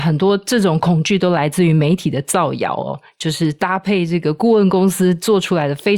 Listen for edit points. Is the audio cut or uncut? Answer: uncut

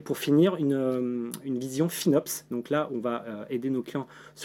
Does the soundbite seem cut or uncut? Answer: uncut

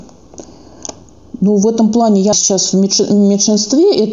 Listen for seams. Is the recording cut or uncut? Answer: cut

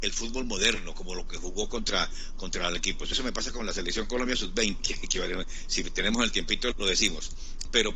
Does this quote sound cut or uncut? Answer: cut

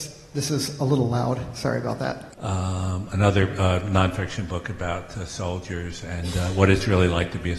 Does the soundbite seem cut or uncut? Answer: cut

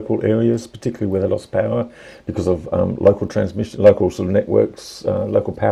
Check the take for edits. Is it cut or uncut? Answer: uncut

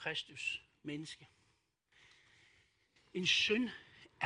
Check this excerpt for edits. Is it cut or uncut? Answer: uncut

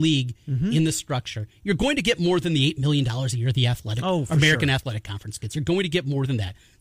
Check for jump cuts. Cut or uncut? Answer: uncut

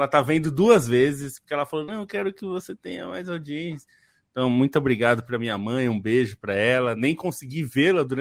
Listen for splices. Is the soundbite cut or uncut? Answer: uncut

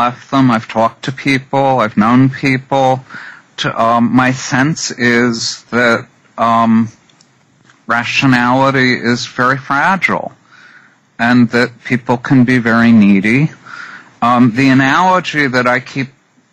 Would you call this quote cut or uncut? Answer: cut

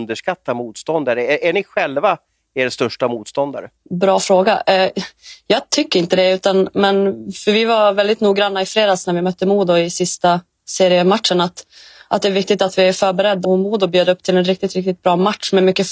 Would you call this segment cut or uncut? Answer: cut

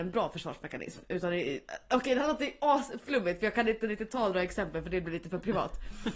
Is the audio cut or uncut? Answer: uncut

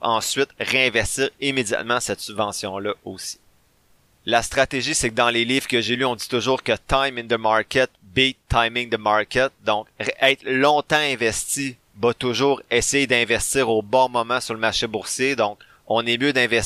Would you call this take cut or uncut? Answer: uncut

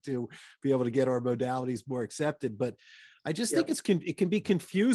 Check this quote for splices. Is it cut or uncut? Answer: uncut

